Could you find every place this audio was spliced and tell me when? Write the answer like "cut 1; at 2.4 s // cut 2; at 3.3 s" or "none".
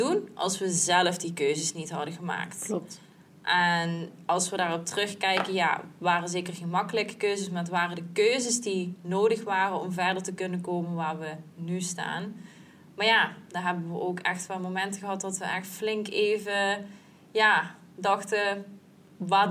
none